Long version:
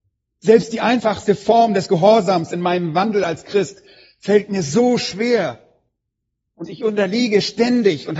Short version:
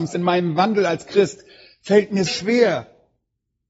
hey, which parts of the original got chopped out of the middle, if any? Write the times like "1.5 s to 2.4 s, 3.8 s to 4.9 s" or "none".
4.6 s to 5.0 s